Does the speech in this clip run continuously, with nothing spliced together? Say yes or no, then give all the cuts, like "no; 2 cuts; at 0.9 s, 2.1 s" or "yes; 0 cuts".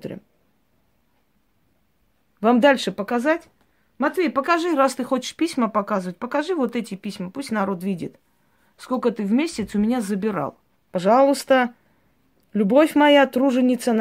no; 1 cut; at 10.7 s